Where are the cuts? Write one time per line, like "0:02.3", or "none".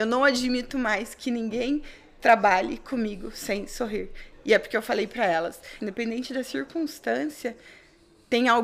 0:04.3
0:05.8